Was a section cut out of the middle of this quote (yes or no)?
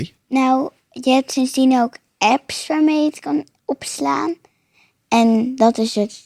no